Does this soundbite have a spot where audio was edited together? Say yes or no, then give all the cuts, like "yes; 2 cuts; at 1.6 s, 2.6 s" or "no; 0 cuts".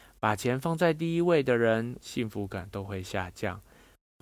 yes; 1 cut; at 2.0 s